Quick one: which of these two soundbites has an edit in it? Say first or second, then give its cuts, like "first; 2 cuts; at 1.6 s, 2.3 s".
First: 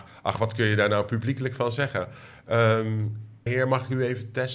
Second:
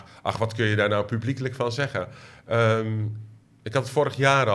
first; 1 cut; at 3.5 s